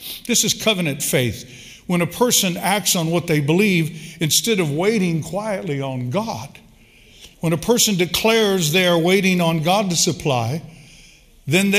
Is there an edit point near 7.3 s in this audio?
yes; 1 cut; at 7.3 s

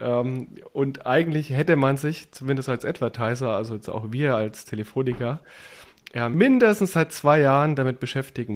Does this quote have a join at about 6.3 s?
yes; 1 cut; at 6.3 s

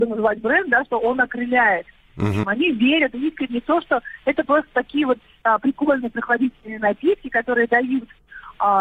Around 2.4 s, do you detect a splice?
yes; 1 cut; at 2.4 s

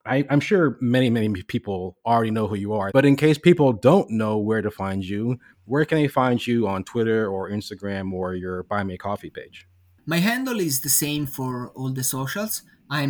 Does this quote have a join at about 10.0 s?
no; 1 cut; at 2.9 s

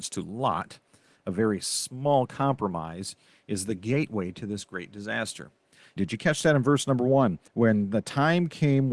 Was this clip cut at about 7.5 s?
yes; 2 cuts; at 6.0 s, 7.5 s

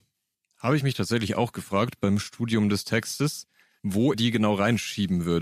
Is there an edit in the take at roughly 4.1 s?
yes; 1 cut; at 4.1 s

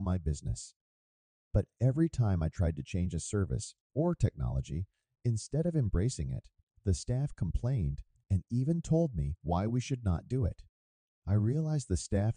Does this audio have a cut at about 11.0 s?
no; 1 cut; at 3.9 s

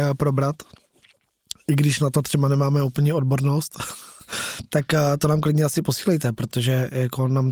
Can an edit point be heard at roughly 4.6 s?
no; 0 cuts

